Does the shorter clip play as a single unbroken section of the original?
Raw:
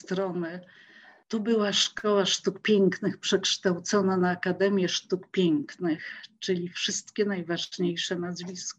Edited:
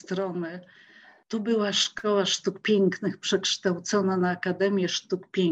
yes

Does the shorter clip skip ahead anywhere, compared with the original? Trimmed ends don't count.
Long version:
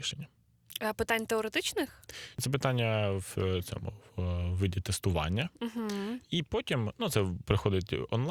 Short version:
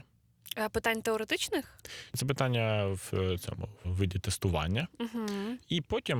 yes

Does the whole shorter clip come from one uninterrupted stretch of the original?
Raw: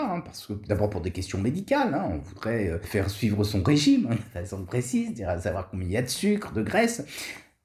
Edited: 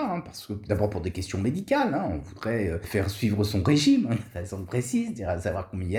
yes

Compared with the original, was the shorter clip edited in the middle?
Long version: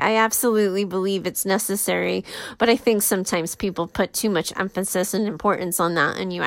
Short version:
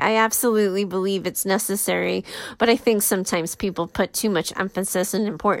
no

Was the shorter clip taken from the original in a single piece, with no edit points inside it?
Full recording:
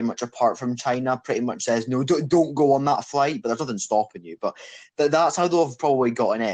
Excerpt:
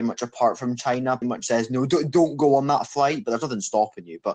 no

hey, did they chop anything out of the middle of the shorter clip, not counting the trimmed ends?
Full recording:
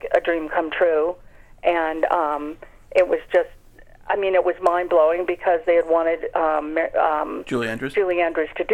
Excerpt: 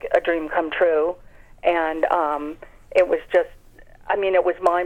no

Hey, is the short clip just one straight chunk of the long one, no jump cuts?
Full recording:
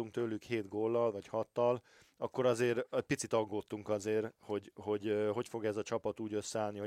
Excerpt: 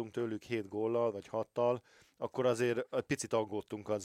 yes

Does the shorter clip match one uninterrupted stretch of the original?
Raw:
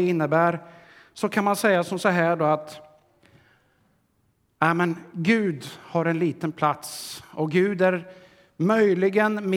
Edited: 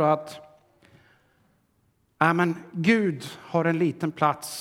yes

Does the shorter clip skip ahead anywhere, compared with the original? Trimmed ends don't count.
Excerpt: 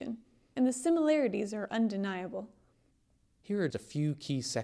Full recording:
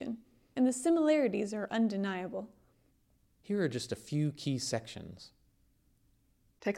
yes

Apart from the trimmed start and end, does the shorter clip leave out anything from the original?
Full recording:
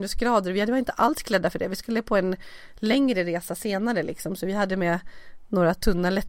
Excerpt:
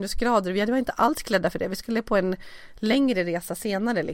no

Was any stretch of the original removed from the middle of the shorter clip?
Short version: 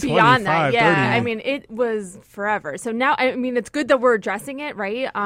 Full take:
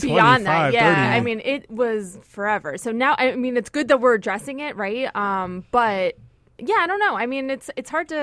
no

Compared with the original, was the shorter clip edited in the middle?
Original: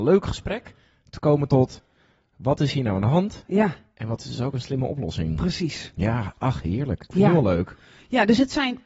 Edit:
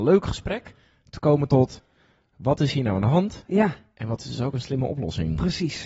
no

